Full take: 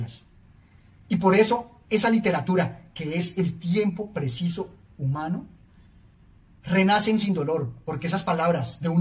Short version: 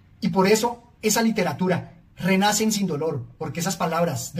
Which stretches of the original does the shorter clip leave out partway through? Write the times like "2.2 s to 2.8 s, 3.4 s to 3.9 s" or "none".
2.9 s to 6.5 s